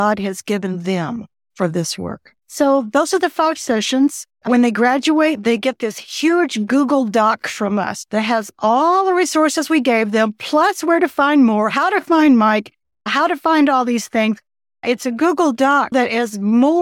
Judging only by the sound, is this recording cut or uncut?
cut